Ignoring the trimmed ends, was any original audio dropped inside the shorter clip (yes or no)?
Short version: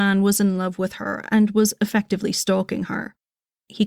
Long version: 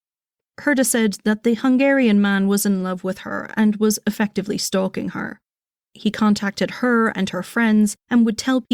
no